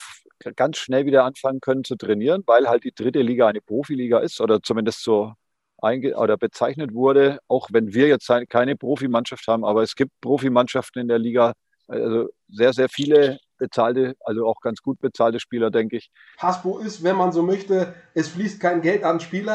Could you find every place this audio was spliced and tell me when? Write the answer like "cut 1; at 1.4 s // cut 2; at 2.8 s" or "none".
cut 1; at 11.8 s // cut 2; at 16.3 s

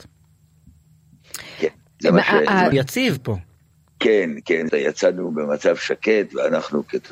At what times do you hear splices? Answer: cut 1; at 2.7 s // cut 2; at 4.7 s

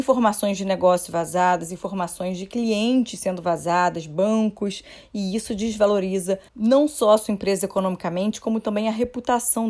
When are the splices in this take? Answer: cut 1; at 6.5 s

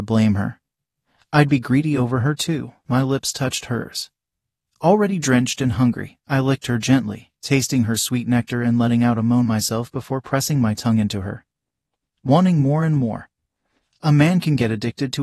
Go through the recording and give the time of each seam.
none

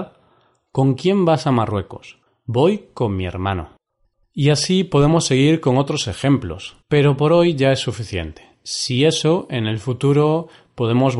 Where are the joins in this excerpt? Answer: cut 1; at 6.8 s

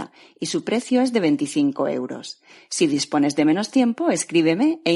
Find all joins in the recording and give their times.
none

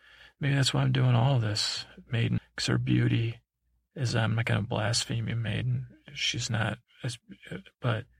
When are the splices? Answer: cut 1; at 2.4 s

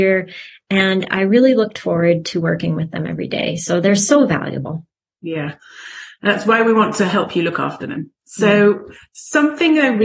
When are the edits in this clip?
none

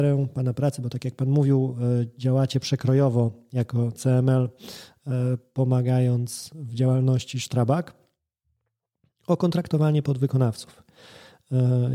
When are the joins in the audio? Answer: none

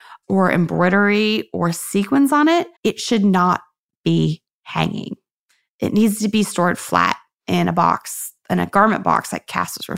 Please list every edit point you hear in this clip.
cut 1; at 2.8 s

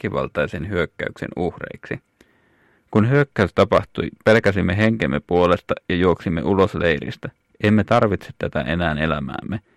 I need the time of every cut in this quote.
cut 1; at 7.5 s

